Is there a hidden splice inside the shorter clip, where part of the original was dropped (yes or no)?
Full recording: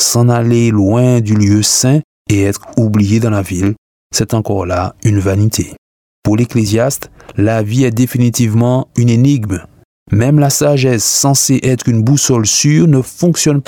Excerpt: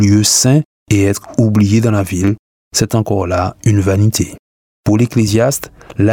no